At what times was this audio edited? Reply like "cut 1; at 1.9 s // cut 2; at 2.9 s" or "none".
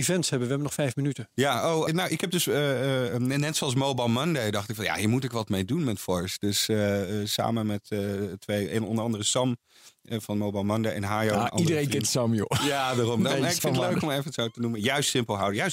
cut 1; at 1.9 s